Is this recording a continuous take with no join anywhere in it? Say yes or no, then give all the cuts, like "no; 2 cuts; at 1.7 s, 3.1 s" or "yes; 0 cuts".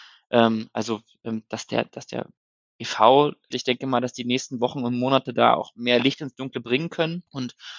no; 1 cut; at 3.5 s